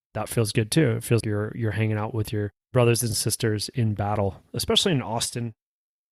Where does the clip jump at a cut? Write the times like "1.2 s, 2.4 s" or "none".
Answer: 1.2 s, 2.6 s